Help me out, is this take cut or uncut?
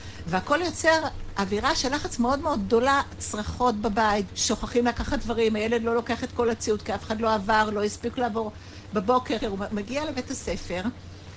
cut